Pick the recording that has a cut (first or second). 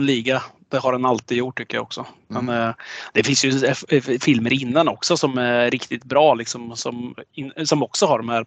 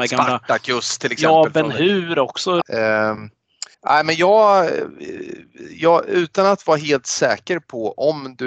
second